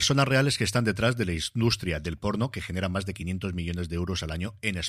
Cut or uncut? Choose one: uncut